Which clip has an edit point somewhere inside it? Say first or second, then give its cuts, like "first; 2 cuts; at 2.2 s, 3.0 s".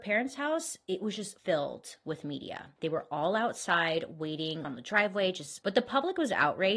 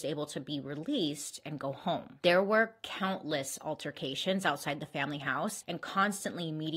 first; 1 cut; at 4.6 s